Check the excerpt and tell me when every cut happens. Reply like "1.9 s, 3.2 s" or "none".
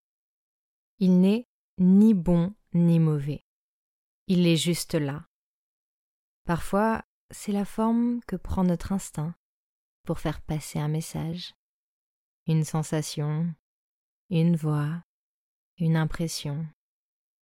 none